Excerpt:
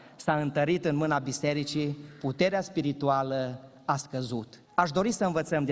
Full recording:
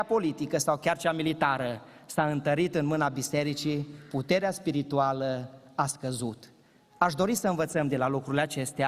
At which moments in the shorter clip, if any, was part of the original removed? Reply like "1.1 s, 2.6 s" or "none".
4.7 s

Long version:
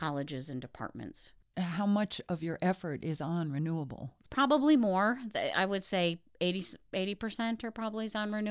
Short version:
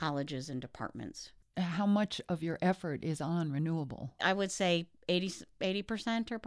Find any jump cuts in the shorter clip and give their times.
4.2 s

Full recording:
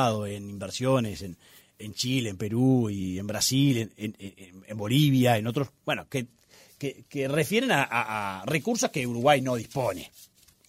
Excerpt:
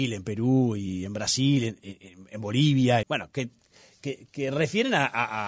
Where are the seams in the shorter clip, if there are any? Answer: 1.8 s, 3.0 s

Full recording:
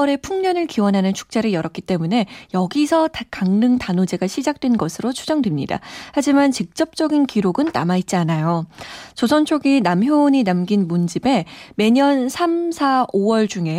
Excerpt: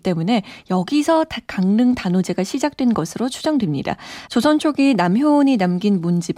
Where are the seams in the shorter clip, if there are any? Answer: 4.3 s

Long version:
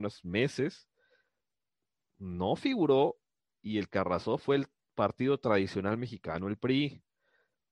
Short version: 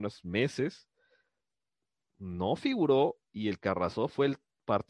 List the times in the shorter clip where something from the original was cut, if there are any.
3.3 s

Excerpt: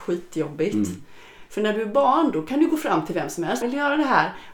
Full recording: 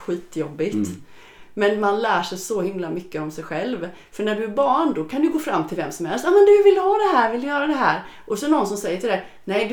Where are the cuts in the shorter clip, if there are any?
1.5 s, 3.6 s

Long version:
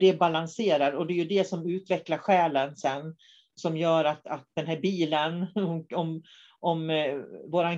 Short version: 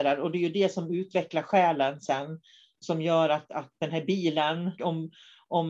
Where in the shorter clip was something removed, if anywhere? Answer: 4.8 s

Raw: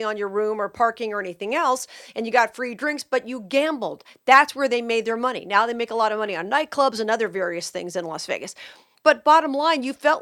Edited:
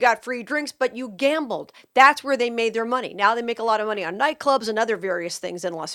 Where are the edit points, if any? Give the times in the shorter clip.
none

